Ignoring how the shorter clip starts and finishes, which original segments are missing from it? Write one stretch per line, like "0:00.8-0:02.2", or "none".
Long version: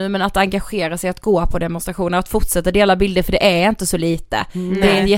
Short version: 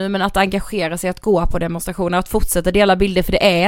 none